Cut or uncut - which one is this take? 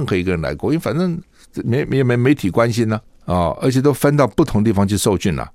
uncut